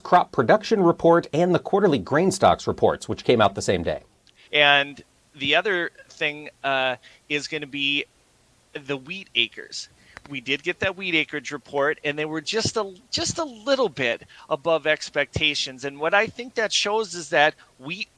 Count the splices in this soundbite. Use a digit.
1